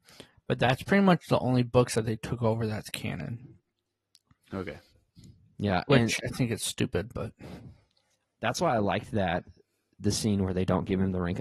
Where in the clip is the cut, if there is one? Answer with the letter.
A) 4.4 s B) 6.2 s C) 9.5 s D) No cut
B